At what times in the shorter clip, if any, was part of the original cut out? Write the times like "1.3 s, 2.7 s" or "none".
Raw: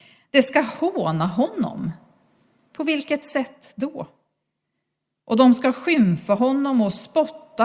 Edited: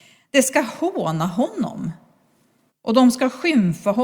2.7 s

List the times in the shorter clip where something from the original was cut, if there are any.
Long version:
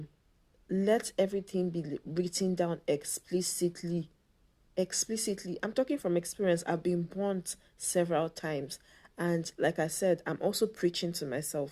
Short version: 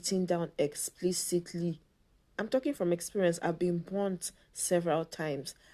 2.4 s

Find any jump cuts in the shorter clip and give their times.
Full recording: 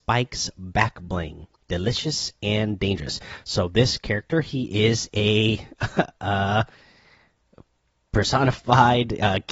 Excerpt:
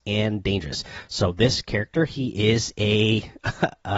none

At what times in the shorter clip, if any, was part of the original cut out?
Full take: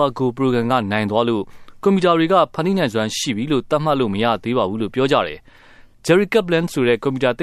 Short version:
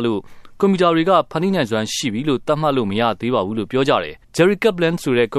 4.2 s

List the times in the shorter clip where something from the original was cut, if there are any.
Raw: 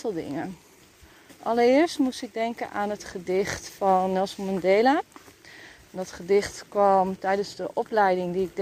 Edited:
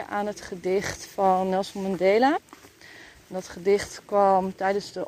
none

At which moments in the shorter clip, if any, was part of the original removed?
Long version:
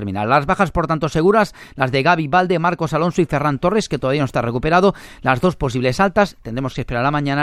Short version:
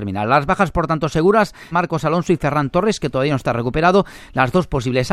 1.7 s

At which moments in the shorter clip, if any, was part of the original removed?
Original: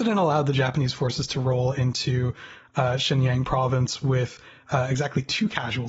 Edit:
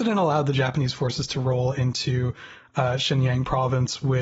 none

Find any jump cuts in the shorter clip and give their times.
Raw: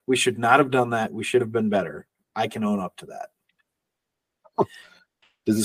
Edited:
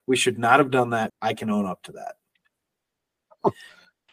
1.1 s

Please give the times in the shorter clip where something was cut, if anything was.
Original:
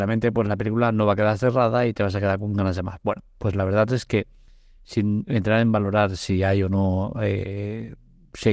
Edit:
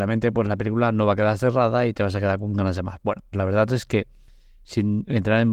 3.3 s

